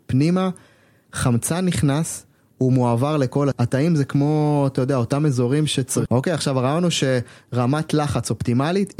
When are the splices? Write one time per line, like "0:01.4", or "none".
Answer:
0:03.5
0:06.1

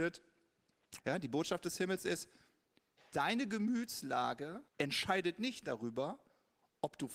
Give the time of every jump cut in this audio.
0:01.0
0:04.7

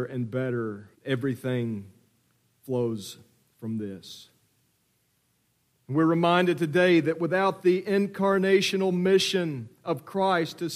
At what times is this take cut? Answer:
0:00.9

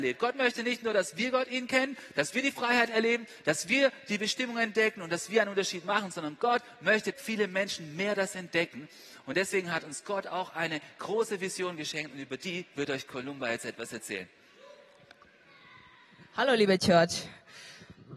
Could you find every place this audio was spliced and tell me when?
0:07.1

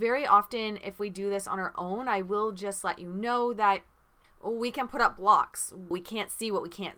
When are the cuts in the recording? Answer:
0:04.2
0:05.9

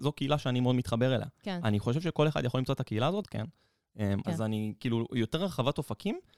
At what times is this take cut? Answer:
0:03.2
0:04.2

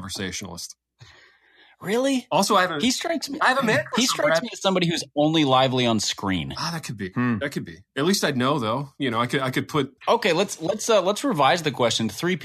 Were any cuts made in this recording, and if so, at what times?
0:07.9
0:10.0

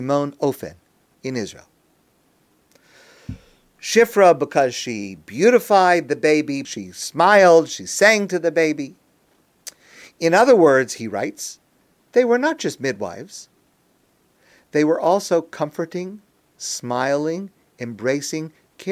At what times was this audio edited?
0:06.6

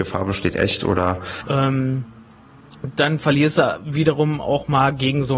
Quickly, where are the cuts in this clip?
0:01.4

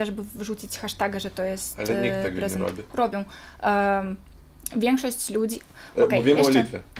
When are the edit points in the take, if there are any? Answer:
none

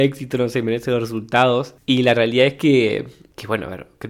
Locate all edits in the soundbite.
none

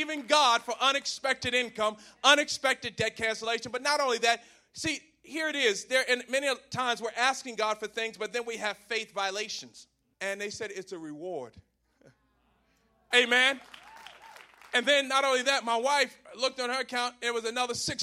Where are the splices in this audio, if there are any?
0:10.1
0:13.1

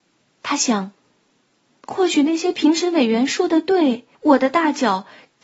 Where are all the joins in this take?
0:04.1

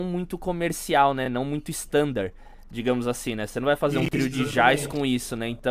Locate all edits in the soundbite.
none

